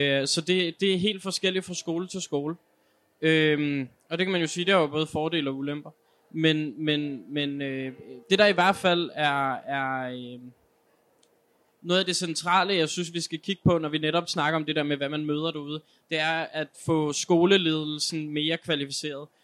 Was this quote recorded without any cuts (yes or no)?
no